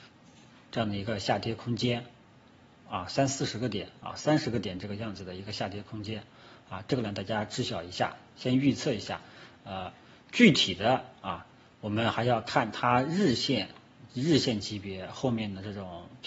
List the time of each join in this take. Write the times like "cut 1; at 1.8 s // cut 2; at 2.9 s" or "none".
none